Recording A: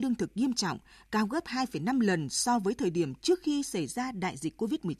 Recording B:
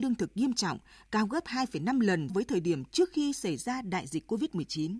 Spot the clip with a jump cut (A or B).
B